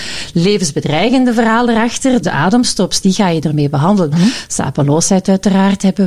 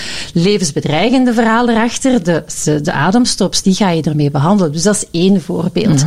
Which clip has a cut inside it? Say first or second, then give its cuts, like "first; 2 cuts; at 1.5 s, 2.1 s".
first; 2 cuts; at 2.2 s, 4.1 s